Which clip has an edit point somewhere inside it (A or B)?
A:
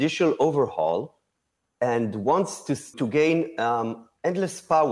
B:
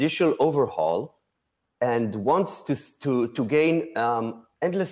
A